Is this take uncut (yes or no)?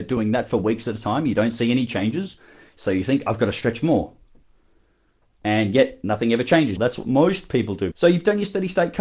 no